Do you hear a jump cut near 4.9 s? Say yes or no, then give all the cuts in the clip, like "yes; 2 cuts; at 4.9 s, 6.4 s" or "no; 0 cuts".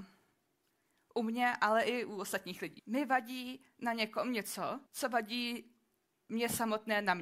yes; 2 cuts; at 2.8 s, 4.9 s